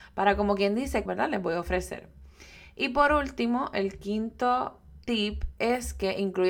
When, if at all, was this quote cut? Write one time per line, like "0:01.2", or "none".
0:01.1

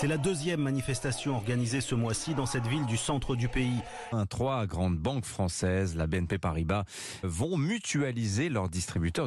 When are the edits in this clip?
0:04.1
0:07.2

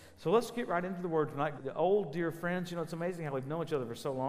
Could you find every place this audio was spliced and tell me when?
0:01.6

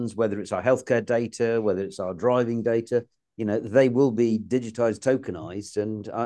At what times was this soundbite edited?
none

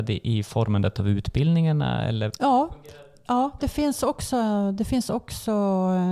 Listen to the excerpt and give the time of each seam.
none

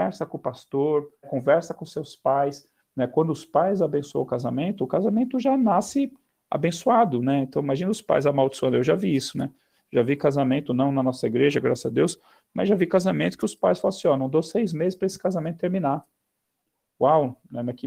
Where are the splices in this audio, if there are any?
0:01.2

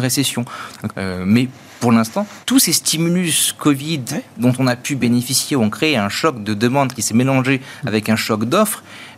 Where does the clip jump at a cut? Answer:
0:00.9
0:02.4

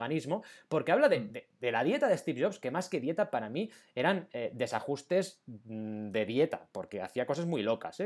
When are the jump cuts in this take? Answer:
none

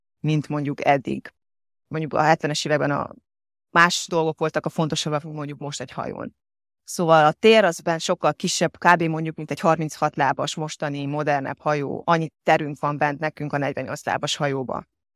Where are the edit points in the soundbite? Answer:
none

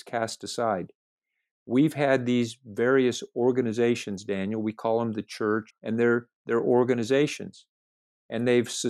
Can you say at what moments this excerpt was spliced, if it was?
0:05.7

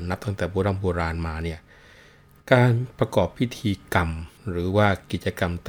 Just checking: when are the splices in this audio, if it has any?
0:04.4

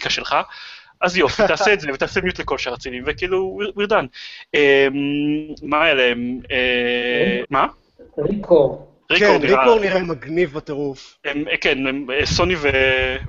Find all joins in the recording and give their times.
0:07.4
0:09.0

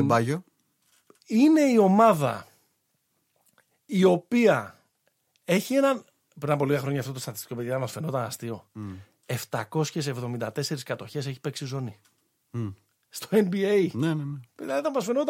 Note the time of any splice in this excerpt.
none

